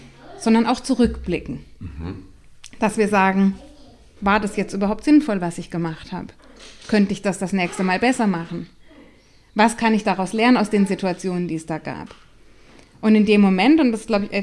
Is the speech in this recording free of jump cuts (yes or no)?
yes